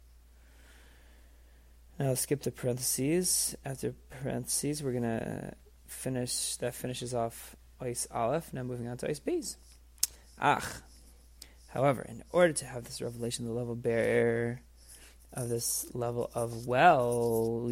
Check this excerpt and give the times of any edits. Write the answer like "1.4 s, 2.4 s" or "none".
none